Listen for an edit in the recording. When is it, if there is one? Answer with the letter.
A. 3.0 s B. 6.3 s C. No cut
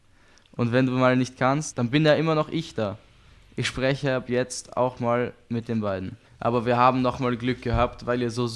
B